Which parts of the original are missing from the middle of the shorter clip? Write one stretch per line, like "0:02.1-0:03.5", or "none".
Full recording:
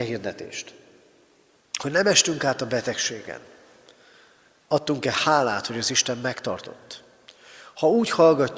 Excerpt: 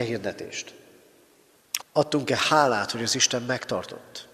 0:01.8-0:04.5